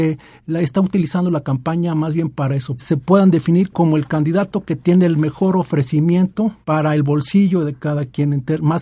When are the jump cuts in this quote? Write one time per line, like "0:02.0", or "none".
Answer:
0:02.8
0:06.6